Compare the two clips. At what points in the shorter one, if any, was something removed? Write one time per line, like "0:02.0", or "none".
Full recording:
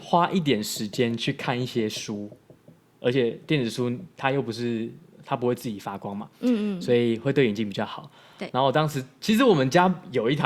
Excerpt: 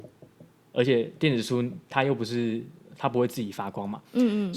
none